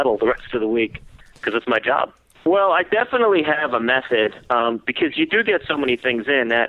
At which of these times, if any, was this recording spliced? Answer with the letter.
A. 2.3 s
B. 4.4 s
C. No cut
A